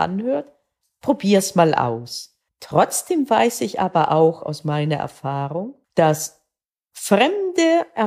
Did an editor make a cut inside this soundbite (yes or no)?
yes